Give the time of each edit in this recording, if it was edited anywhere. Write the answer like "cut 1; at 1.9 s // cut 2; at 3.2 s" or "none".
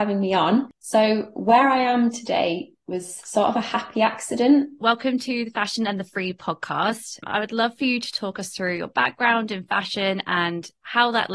cut 1; at 4.8 s